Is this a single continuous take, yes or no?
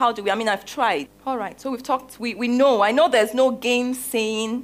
no